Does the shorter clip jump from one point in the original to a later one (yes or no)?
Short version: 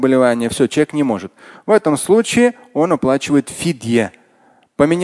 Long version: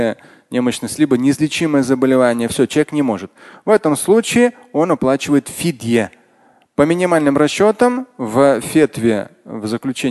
no